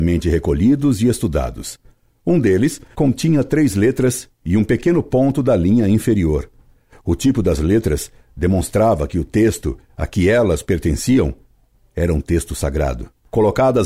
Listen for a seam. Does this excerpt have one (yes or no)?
yes